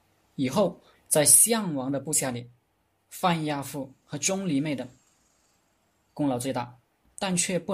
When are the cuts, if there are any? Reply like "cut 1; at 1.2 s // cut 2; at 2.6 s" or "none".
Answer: cut 1; at 0.9 s